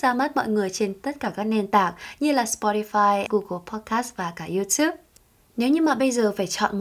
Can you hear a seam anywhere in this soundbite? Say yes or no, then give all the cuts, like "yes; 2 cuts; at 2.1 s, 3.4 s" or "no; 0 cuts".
yes; 1 cut; at 3.3 s